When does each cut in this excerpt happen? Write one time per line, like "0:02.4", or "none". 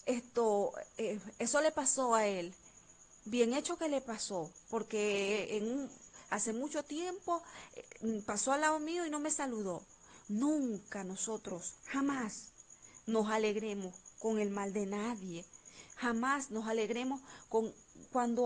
0:10.2

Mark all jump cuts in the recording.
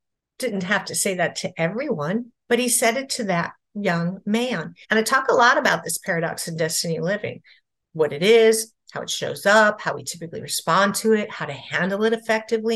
0:04.8

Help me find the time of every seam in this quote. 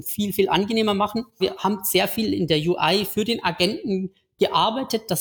0:01.4

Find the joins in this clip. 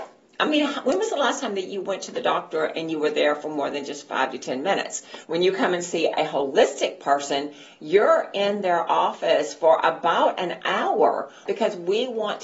0:05.2
0:11.5

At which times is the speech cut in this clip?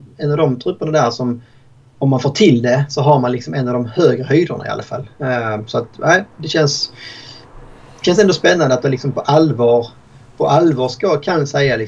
none

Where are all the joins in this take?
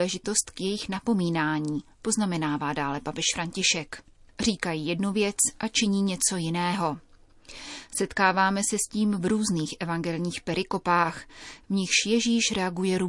0:04.3

